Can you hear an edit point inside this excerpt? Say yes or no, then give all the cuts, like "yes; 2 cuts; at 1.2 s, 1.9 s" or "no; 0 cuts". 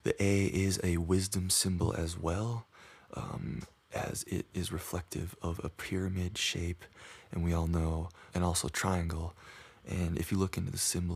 yes; 1 cut; at 8.3 s